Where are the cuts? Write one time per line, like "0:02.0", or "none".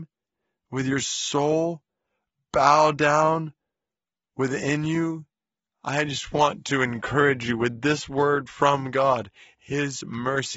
none